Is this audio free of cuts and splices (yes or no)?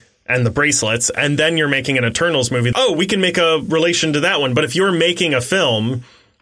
no